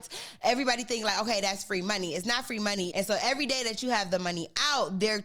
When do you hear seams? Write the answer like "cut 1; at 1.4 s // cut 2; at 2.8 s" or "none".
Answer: cut 1; at 2.9 s